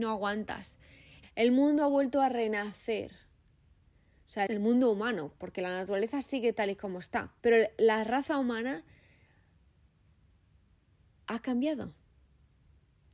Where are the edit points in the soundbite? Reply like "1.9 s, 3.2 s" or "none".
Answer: 1.2 s, 4.5 s, 7.4 s